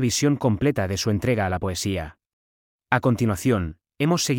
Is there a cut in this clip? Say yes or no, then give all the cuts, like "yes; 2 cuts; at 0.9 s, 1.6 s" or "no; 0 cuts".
yes; 1 cut; at 2.7 s